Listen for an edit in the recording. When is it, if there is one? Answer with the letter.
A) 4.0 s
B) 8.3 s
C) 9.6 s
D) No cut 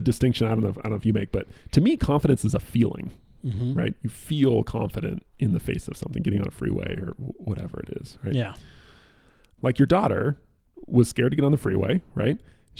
C